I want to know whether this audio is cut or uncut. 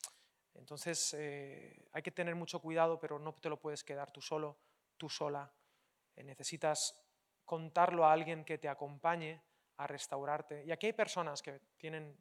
uncut